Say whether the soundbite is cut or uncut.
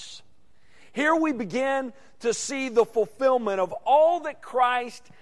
uncut